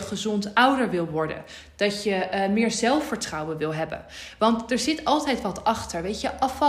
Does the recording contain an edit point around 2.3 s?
no; 0 cuts

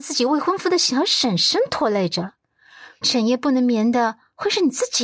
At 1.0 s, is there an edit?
no; 1 cut; at 3.0 s

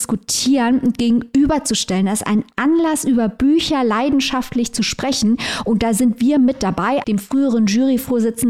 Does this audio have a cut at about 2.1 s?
no; 1 cut; at 7.0 s

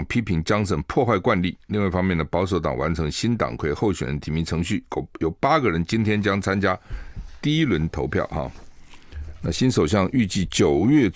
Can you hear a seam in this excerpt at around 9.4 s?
no; 0 cuts

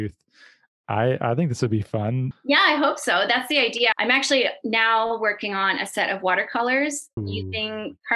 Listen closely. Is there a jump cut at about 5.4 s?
no; 3 cuts; at 2.3 s, 3.9 s, 7.2 s

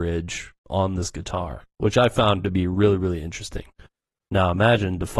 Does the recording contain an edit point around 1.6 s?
no; 1 cut; at 4.3 s

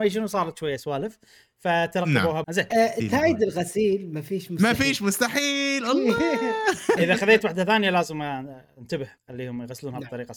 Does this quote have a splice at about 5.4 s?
no; 3 cuts; at 2.4 s, 7.0 s, 9.2 s

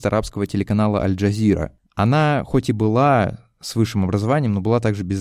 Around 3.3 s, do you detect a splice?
no; 1 cut; at 1.8 s

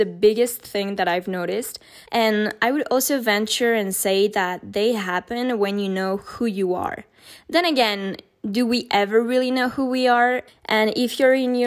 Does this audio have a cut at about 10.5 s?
yes; 2 cuts; at 2.1 s, 10.5 s

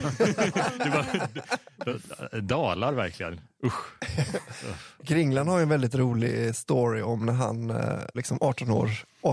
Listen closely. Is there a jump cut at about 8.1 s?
yes; 1 cut; at 8.1 s

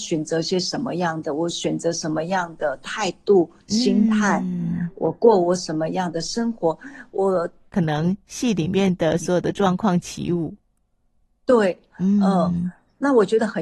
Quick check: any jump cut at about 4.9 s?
no; 2 cuts; at 7.7 s, 11.9 s

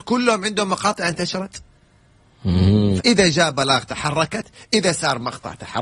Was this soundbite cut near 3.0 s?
yes; 1 cut; at 3.0 s

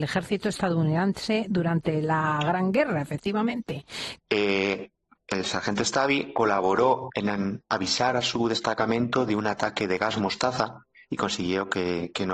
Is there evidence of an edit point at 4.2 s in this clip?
yes; 2 cuts; at 4.2 s, 7.1 s

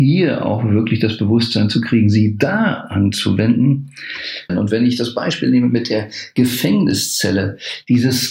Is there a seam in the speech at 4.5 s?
yes; 1 cut; at 4.5 s

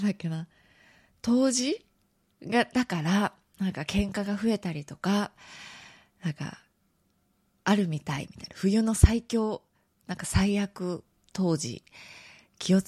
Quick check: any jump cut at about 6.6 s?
no; 0 cuts

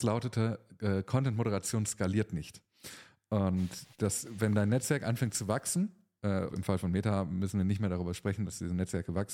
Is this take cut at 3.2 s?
no; 1 cut; at 6.5 s

